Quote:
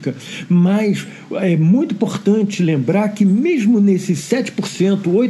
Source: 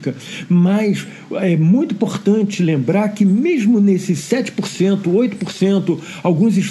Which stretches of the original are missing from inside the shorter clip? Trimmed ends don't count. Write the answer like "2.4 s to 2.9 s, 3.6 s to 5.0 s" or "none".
none